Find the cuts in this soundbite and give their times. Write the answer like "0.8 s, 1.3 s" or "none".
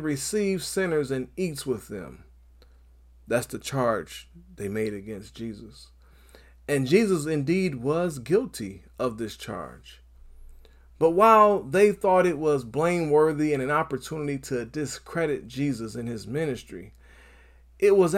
none